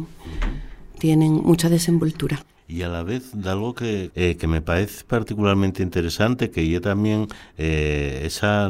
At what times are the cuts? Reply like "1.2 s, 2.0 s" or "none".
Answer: 2.6 s, 4.1 s